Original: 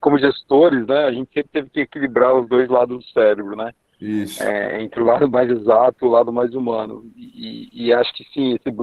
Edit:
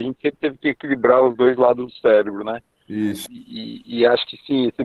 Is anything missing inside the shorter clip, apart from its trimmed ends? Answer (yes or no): yes